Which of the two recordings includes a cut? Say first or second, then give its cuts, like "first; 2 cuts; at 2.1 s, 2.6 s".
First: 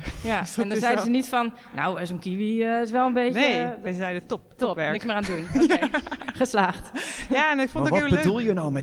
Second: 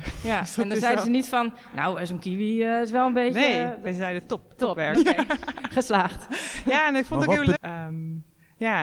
second; 2 cuts; at 4.9 s, 7.6 s